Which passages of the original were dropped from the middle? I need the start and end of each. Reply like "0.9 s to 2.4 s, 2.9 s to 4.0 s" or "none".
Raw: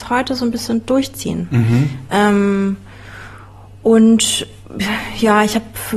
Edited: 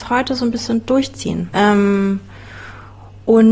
1.5 s to 2.1 s

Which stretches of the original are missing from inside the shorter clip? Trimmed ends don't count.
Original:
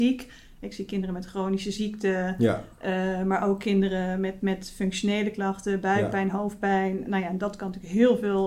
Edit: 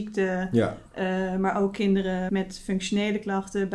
4.2 s to 4.4 s

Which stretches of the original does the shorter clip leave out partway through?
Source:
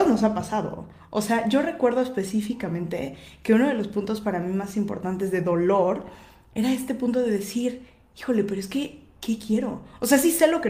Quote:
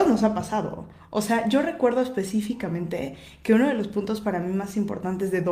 none

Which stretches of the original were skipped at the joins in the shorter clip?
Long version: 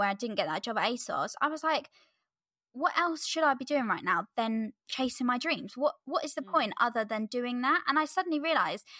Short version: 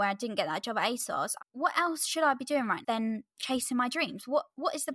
1.4 s to 2.6 s, 4.0 s to 4.3 s

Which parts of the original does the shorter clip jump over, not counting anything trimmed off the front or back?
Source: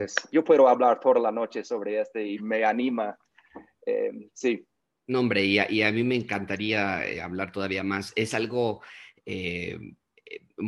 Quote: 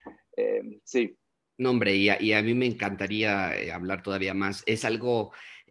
none

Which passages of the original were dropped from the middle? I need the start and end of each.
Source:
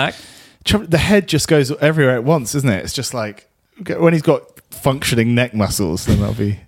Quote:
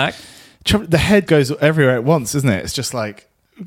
1.3 s to 1.5 s

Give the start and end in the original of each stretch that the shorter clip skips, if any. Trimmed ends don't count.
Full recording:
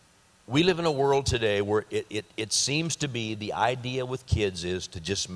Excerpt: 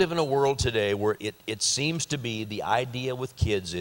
1.9 s to 2.1 s

